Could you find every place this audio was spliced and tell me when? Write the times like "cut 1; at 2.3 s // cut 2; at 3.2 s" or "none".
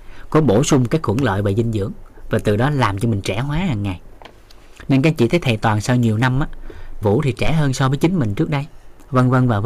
cut 1; at 7.0 s